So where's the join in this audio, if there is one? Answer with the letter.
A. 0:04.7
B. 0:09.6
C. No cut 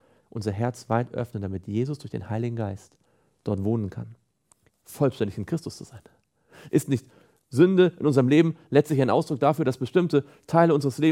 A